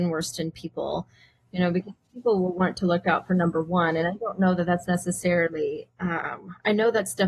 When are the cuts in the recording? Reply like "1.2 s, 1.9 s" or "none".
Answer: none